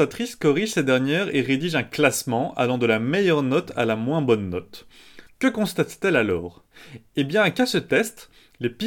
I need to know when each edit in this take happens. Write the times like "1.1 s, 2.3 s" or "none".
5.3 s